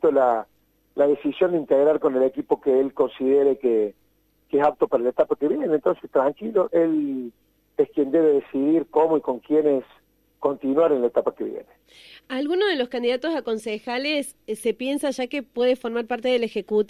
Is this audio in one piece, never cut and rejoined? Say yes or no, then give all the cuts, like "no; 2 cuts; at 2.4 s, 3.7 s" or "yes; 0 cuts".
yes; 0 cuts